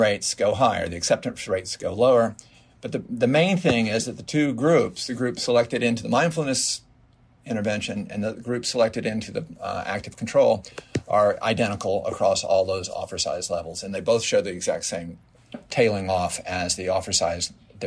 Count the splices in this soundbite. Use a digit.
0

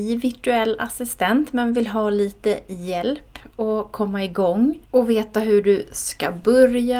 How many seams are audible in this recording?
1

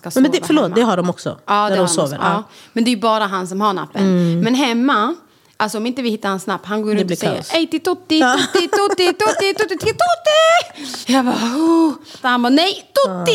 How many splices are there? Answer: 3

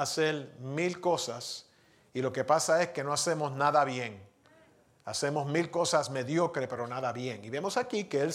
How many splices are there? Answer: 0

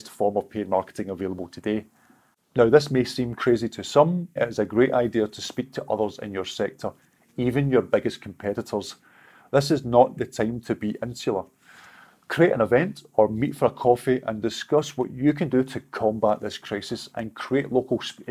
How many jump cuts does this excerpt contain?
1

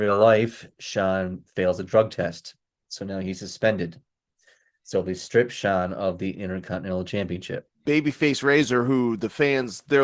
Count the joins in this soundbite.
1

